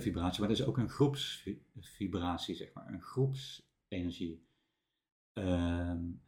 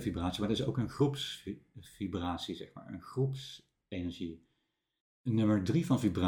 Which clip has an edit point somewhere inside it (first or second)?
second